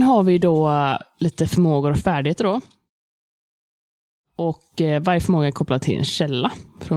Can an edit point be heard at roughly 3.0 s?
no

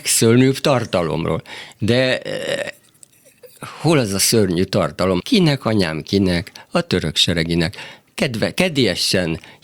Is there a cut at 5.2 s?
yes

